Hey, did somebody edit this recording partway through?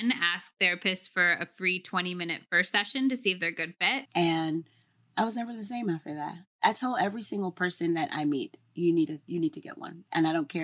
yes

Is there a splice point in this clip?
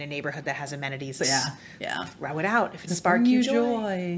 yes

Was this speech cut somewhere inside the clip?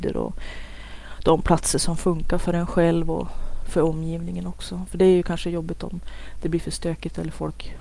no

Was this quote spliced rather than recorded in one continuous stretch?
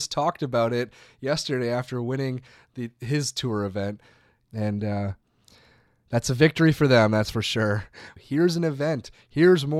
yes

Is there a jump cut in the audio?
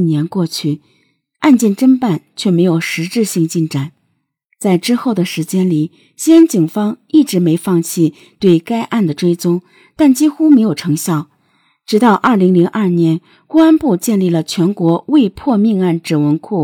no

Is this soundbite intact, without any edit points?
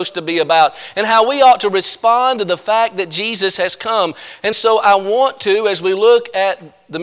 yes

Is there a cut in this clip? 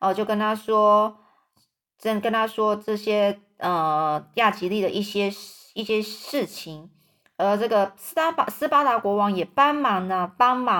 no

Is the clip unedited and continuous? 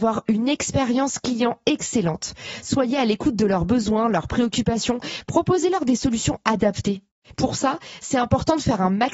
yes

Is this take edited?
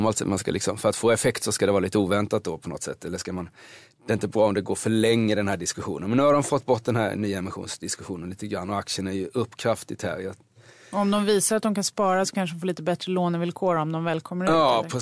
no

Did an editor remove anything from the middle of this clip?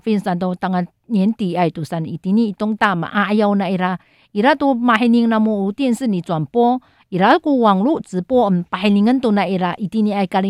no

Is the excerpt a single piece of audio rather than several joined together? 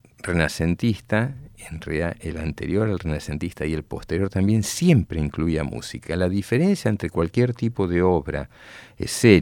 yes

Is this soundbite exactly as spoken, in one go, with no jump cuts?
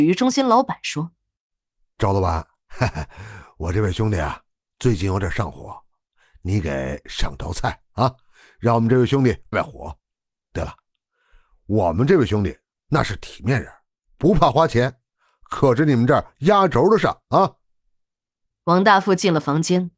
no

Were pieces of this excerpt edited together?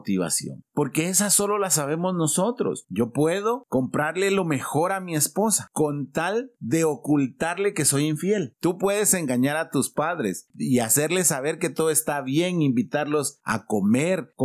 yes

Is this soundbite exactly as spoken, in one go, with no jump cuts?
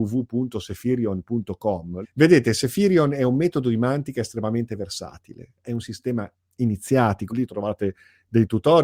no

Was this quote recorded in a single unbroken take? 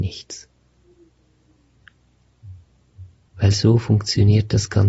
yes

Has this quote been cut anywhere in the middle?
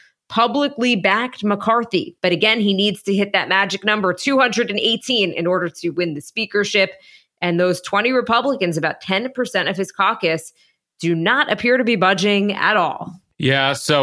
yes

